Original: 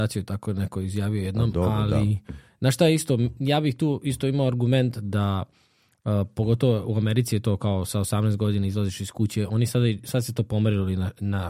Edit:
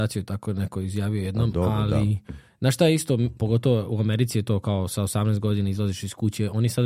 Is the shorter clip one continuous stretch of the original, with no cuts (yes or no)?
no